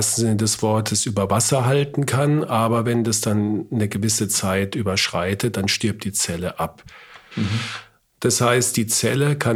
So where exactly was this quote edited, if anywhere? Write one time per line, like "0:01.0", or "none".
0:07.3